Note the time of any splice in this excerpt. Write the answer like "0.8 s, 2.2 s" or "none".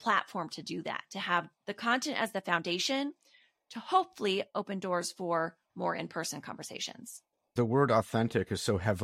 none